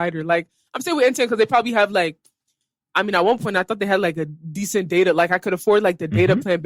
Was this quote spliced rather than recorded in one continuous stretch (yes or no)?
no